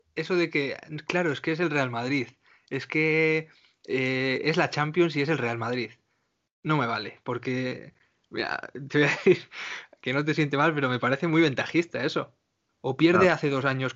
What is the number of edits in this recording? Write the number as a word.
one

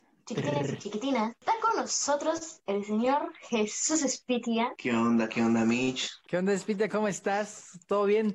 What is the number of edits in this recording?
one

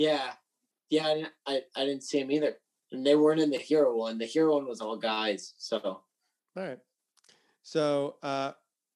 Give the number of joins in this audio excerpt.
zero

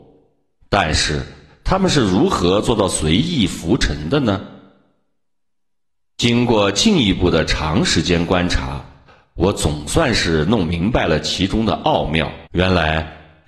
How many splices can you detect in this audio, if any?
one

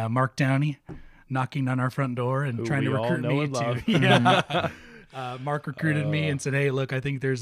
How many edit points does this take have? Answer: zero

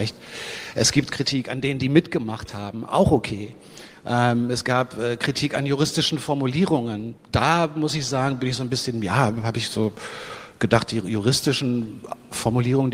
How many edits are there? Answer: zero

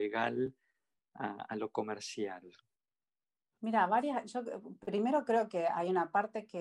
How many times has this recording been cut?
zero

